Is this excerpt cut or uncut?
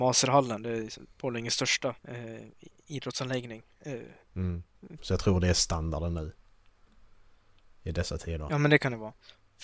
cut